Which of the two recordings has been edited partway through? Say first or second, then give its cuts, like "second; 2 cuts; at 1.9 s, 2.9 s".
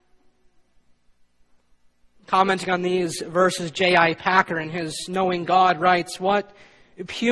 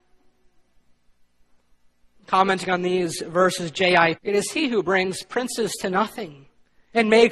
second; 1 cut; at 4.2 s